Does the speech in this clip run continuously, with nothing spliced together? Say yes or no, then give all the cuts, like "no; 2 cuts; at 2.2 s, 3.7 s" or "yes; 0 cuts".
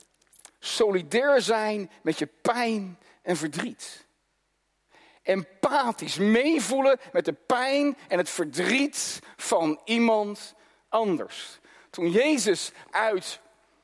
yes; 0 cuts